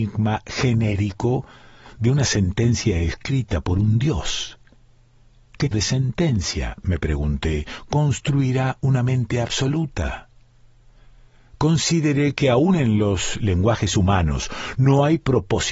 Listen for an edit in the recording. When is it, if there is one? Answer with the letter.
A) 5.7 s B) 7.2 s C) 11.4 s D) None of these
A